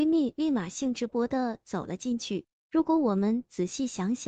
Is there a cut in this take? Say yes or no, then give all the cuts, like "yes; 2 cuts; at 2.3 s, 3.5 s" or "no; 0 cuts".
yes; 1 cut; at 1.1 s